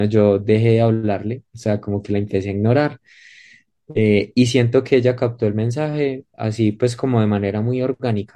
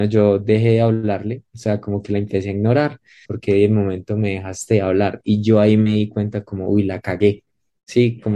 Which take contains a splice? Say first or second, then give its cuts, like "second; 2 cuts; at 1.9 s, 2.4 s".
second; 1 cut; at 3.2 s